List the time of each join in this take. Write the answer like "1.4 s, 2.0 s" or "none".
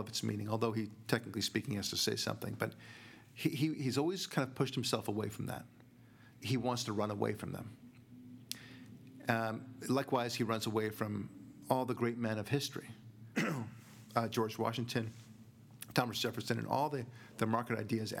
6.4 s, 13.3 s